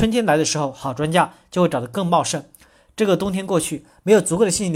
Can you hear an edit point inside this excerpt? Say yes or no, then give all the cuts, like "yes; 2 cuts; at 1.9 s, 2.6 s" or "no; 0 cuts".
no; 0 cuts